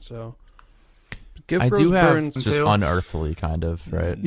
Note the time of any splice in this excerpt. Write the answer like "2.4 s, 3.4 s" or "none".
2.4 s